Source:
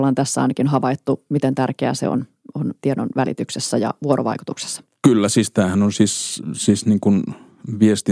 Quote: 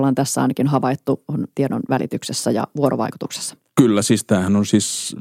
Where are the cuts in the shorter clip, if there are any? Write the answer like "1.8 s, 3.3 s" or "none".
1.3 s

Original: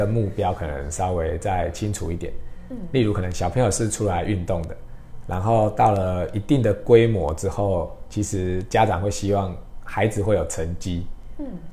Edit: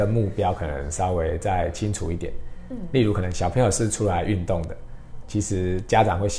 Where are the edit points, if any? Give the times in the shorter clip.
5.2 s

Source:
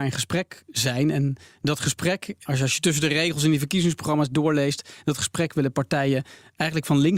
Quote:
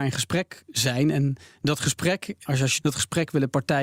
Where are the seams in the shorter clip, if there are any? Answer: 2.8 s

